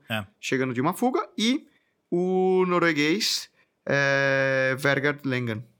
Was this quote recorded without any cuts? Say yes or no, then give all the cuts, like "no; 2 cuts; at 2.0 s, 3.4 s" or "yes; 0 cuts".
yes; 0 cuts